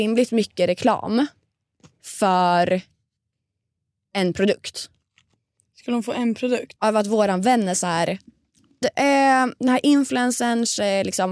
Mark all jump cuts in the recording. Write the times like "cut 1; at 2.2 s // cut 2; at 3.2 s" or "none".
cut 1; at 6.8 s // cut 2; at 8.8 s